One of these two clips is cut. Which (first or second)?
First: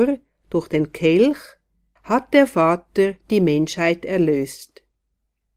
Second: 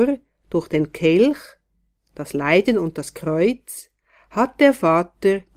first